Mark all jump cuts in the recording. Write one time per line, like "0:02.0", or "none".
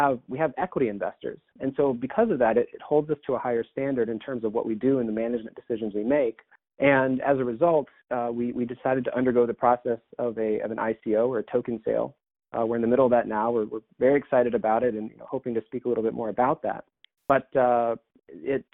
none